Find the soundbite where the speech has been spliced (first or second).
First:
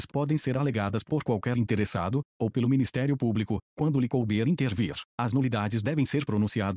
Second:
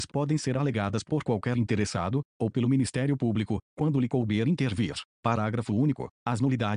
first